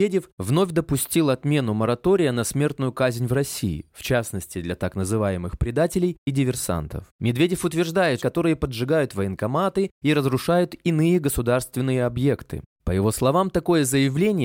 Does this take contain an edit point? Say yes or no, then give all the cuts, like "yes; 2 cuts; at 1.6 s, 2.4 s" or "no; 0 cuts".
yes; 3 cuts; at 7.1 s, 8.2 s, 12.7 s